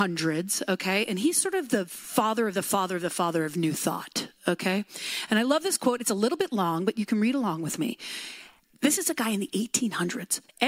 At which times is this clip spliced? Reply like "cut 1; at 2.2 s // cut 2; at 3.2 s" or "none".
none